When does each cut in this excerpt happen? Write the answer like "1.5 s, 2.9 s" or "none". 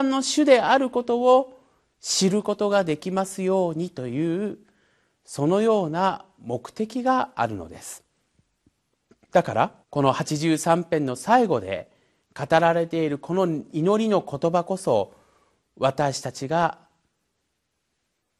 9.8 s